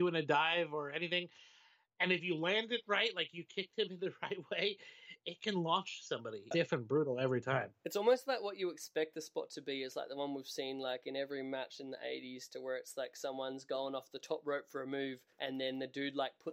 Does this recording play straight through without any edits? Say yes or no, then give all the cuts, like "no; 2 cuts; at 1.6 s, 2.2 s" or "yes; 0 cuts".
no; 2 cuts; at 6.5 s, 15.3 s